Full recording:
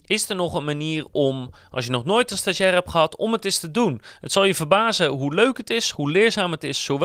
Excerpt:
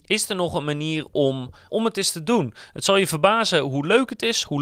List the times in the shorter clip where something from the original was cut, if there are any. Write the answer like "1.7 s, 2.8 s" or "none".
1.7 s